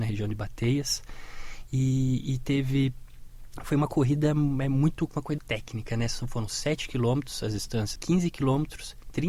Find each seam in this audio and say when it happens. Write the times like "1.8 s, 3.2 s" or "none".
5.4 s, 8.0 s